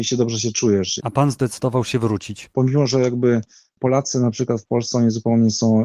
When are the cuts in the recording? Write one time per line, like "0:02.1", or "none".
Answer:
0:01.0
0:02.5